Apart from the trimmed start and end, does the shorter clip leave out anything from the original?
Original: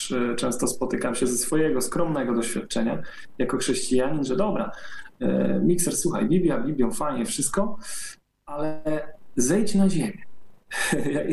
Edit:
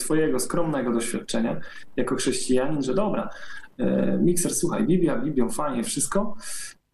no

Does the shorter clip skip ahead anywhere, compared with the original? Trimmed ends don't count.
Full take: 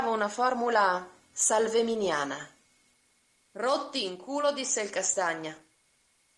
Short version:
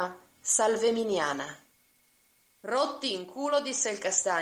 no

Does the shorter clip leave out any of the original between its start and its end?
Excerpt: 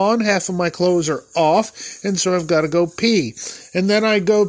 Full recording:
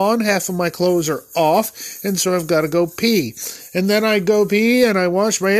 no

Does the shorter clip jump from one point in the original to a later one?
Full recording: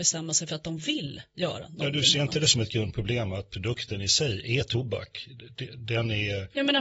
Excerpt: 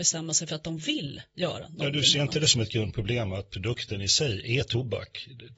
no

